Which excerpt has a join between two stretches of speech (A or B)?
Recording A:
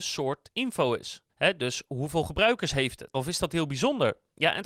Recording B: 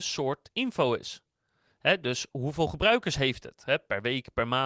A